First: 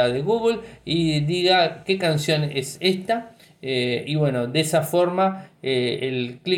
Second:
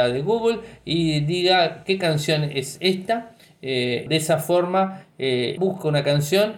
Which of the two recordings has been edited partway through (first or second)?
second